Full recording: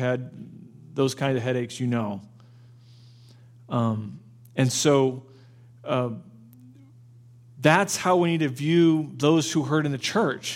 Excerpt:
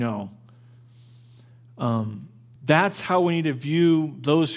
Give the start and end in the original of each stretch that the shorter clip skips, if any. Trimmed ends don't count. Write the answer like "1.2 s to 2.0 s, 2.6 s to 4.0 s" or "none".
4.5 s to 7.5 s